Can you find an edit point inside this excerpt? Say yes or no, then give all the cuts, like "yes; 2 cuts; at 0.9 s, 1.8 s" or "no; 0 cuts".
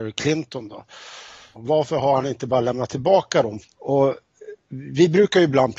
yes; 2 cuts; at 1.5 s, 3.6 s